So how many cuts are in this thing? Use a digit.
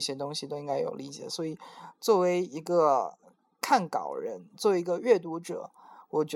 0